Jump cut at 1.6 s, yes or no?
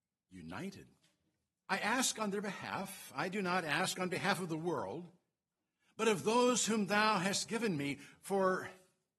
yes